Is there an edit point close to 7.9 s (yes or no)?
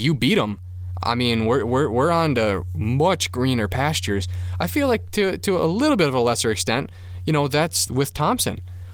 yes